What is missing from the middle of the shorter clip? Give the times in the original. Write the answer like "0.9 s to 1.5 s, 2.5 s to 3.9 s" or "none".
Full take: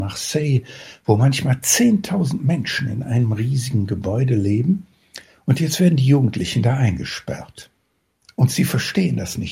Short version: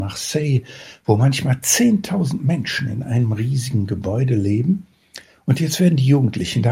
none

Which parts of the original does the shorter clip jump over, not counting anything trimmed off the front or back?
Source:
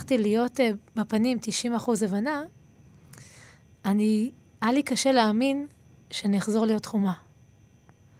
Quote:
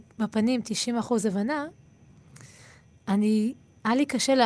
none

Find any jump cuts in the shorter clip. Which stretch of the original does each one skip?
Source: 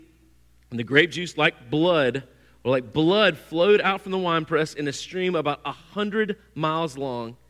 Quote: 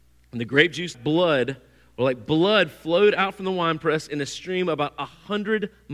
1.3 s to 1.6 s

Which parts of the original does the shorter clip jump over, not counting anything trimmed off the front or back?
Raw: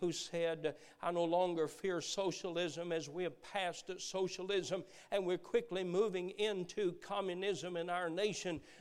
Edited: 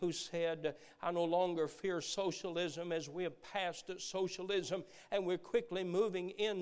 none

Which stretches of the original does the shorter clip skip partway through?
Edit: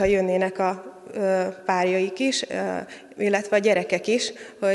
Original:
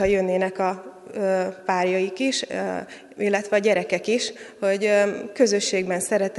none

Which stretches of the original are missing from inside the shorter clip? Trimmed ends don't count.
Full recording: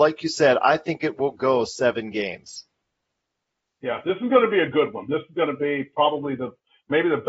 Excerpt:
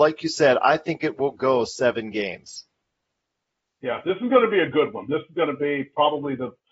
none

